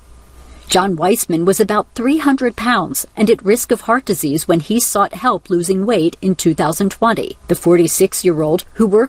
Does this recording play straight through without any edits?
no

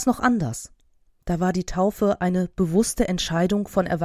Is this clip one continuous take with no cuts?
yes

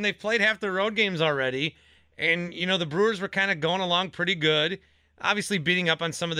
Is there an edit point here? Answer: no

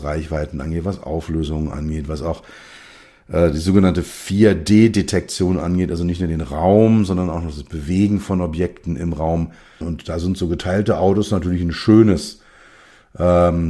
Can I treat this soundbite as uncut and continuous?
no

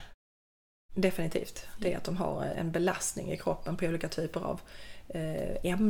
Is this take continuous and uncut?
no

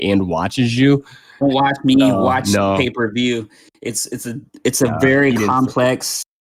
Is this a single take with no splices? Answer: no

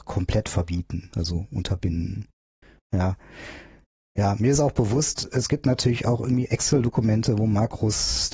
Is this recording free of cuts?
yes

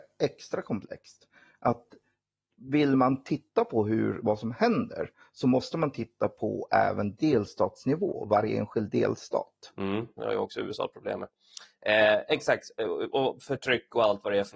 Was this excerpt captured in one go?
no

